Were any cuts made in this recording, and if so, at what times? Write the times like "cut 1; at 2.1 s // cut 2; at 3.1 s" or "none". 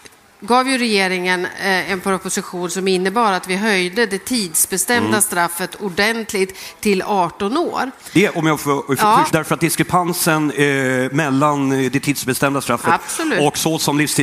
cut 1; at 9.3 s